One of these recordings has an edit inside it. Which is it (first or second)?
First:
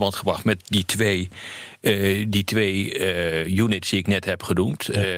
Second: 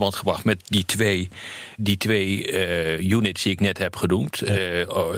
second